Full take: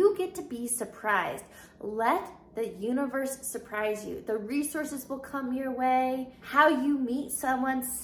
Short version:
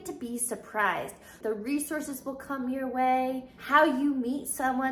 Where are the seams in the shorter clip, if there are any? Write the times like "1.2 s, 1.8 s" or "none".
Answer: 1.4 s

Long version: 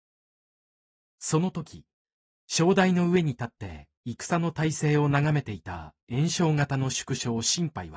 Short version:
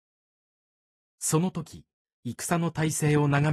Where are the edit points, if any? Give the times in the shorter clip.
2.2 s

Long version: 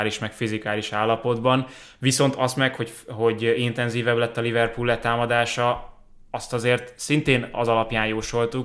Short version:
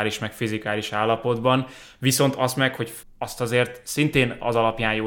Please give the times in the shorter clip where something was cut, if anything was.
3.0 s

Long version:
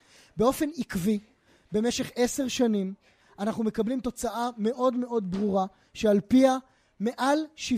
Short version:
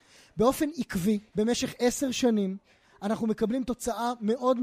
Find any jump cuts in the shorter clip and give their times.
1.3 s

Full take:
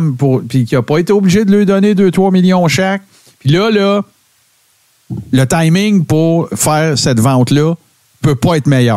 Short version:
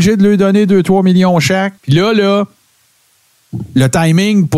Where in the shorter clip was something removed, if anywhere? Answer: 1.8 s

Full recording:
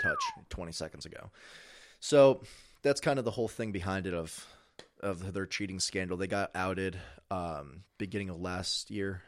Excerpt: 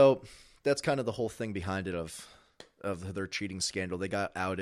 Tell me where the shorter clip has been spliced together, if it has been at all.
none

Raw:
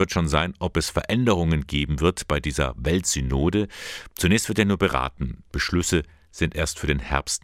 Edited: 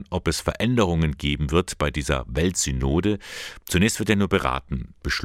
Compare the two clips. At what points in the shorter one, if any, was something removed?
none

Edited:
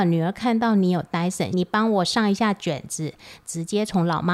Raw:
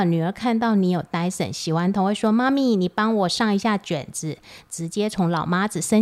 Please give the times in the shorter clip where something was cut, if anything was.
1.5 s

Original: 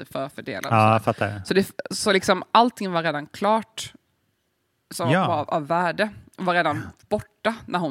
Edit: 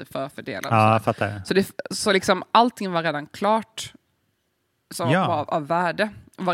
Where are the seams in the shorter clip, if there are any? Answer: none

